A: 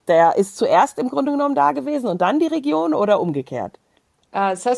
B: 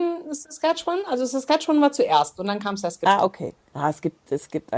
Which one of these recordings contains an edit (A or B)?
B